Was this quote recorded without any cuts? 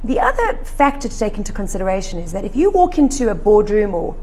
yes; 0 cuts

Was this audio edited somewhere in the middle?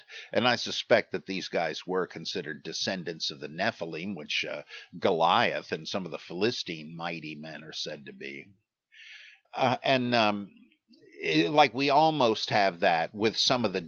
yes; 1 cut; at 9.4 s

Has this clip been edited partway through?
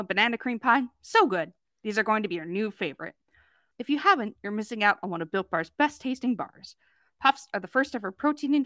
yes; 1 cut; at 3.7 s

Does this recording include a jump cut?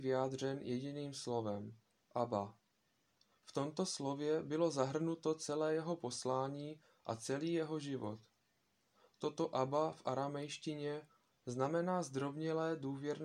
yes; 1 cut; at 11.3 s

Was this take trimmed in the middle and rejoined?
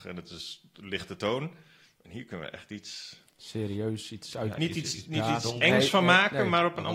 no; 0 cuts

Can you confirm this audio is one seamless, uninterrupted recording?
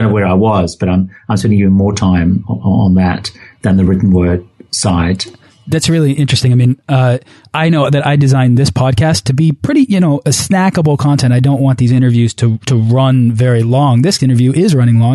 yes; 0 cuts

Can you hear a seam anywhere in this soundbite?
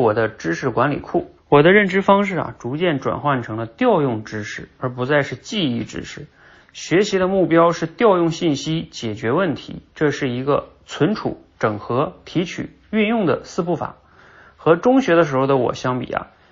yes; 1 cut; at 1.4 s

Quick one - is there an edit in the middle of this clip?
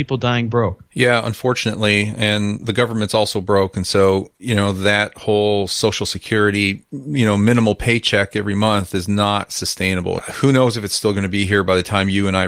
no; 0 cuts

